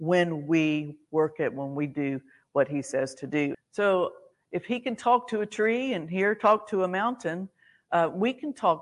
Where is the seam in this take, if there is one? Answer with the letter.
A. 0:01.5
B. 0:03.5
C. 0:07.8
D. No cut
B